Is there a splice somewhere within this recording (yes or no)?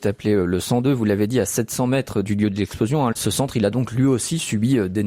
no